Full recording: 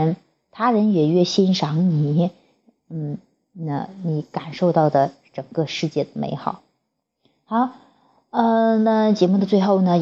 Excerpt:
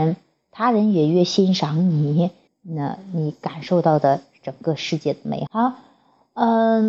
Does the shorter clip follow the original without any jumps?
no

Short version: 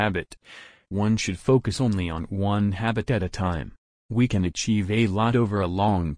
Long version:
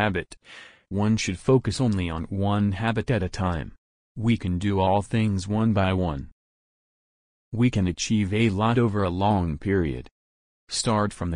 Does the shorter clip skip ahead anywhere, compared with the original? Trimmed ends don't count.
yes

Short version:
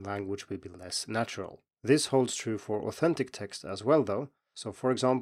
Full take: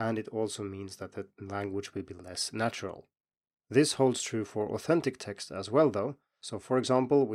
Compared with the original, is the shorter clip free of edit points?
no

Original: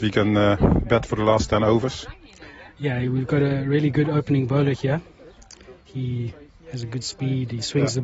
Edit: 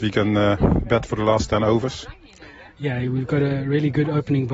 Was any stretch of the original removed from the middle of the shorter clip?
no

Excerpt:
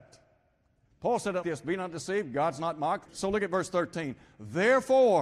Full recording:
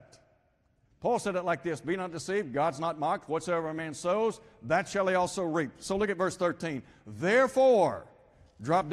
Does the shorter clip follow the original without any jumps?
no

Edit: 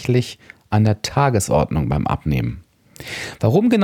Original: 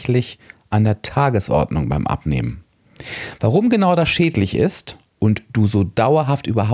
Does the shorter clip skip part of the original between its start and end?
no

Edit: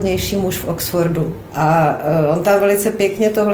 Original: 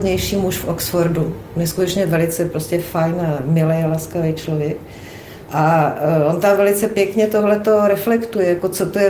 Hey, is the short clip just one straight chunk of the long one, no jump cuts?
no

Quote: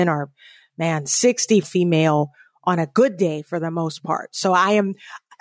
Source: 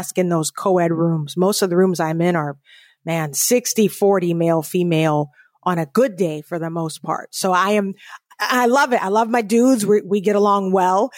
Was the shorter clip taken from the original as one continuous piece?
no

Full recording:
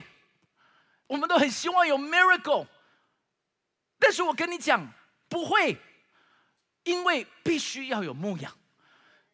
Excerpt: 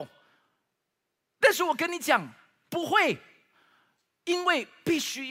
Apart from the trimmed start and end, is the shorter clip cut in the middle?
no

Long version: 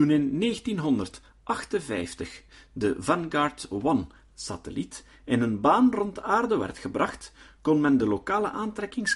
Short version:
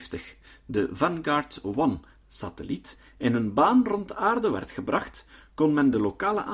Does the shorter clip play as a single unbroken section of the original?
yes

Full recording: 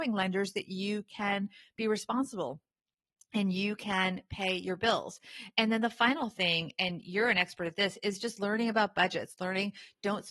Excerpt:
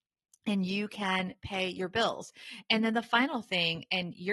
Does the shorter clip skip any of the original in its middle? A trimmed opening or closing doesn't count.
no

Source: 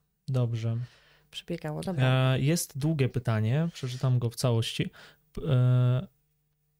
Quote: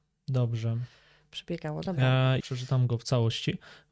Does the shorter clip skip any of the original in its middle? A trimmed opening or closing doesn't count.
yes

